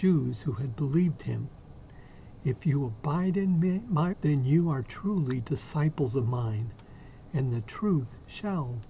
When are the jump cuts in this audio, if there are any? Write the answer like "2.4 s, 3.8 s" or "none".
4.1 s, 7.3 s